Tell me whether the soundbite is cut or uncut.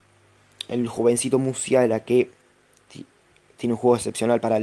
uncut